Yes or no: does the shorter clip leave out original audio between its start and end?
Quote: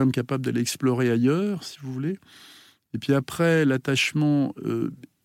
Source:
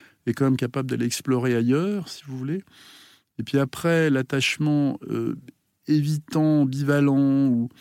no